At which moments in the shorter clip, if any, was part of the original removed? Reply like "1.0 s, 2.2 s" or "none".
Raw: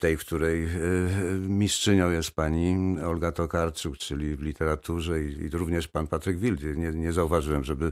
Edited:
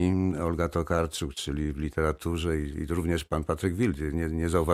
none